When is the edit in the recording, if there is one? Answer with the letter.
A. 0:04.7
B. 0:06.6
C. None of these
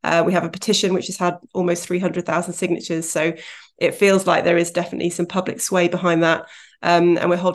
C